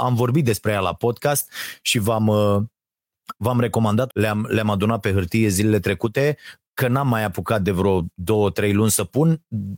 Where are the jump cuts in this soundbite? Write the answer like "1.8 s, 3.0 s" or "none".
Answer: 4.1 s